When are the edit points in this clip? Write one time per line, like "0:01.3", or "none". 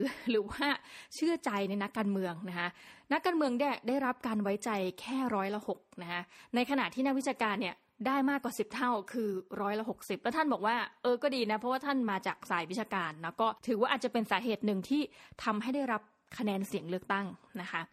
0:13.6